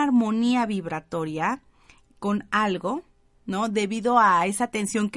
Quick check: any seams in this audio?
no; 0 cuts

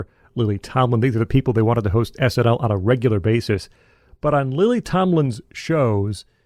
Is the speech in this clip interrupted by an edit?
no; 0 cuts

